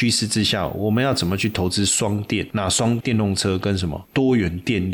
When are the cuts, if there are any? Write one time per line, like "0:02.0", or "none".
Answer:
0:03.0